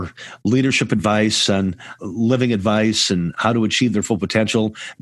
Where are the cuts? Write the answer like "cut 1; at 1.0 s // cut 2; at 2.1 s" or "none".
cut 1; at 2.0 s